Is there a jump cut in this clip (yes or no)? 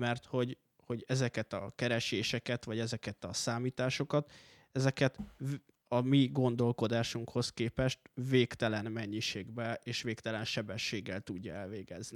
no